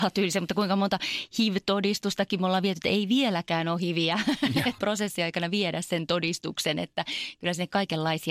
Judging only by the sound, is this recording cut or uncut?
cut